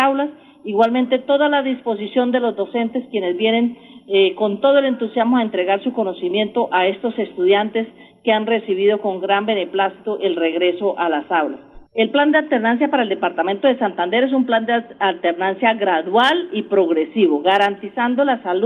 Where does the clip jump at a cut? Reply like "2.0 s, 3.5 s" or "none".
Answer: 11.9 s